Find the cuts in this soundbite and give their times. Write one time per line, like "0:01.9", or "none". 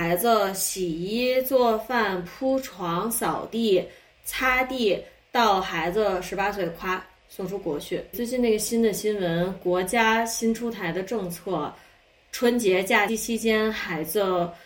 0:08.1
0:13.1

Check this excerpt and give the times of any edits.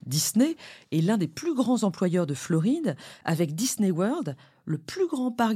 none

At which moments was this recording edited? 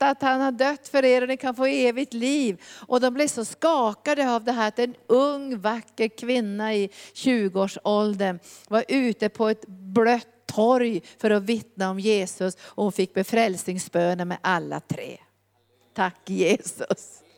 none

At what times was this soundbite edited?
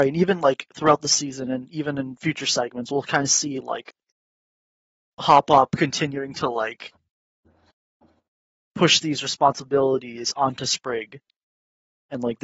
none

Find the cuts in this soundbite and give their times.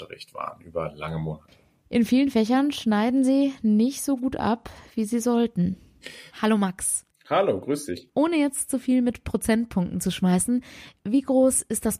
0:06.3

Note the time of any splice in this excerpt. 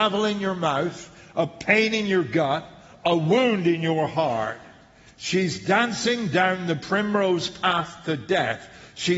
none

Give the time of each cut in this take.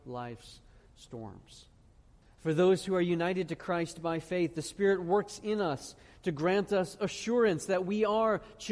0:02.2

